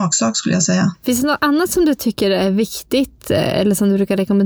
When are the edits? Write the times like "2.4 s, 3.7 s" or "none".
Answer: none